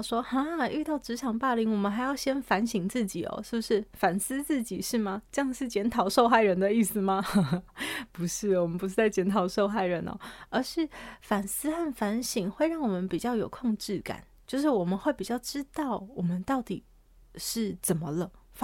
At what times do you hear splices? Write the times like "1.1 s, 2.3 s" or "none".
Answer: none